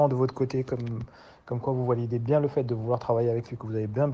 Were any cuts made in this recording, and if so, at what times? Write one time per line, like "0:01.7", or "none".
none